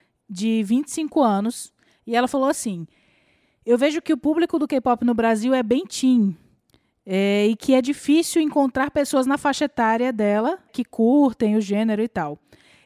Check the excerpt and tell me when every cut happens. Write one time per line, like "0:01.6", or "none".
0:10.7